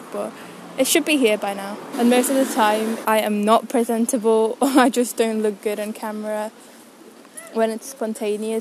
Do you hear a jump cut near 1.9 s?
yes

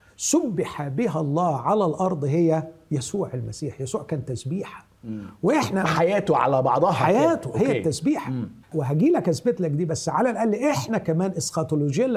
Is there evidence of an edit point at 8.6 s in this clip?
yes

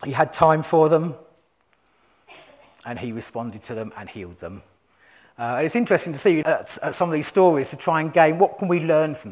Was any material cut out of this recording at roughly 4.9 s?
no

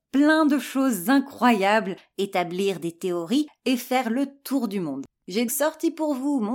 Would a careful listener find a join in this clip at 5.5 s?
yes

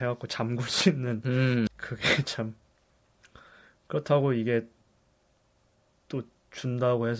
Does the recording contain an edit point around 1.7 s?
yes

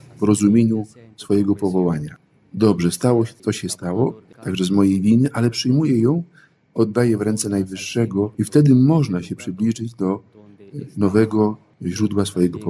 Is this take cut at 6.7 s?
no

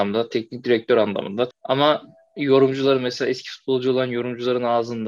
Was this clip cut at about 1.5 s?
yes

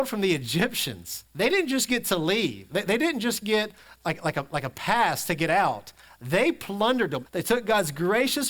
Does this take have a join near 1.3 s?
yes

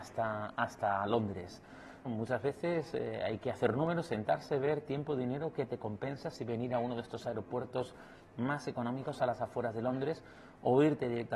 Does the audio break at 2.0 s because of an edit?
yes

